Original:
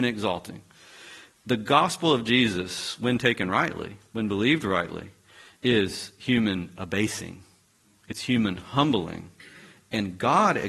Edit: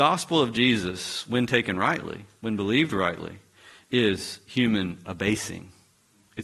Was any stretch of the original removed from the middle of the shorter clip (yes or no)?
no